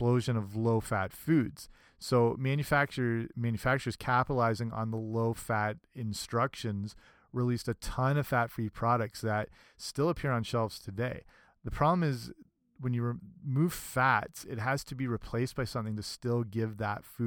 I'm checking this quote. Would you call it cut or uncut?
uncut